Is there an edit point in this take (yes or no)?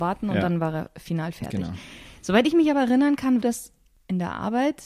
yes